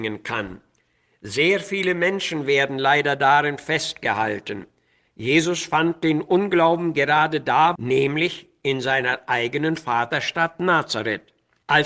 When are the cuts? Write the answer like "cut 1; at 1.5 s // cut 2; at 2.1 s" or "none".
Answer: cut 1; at 5.0 s // cut 2; at 7.8 s